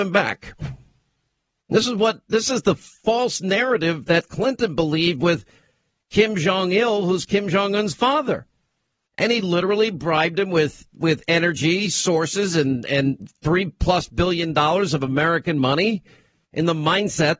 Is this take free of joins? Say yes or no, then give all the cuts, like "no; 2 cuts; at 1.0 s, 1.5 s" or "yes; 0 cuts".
yes; 0 cuts